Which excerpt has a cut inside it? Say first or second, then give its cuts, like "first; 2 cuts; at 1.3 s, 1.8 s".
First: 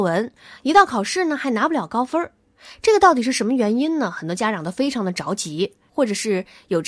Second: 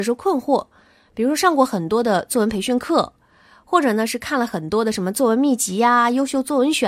first; 1 cut; at 5.9 s